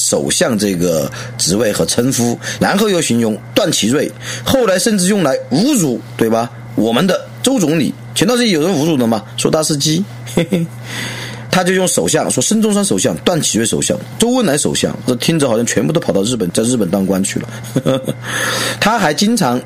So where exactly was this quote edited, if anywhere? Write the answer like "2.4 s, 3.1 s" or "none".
2.6 s